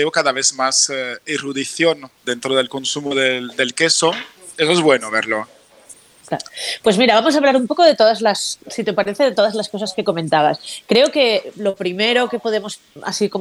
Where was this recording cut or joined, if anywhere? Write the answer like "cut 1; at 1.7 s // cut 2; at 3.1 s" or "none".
cut 1; at 2.2 s // cut 2; at 4.6 s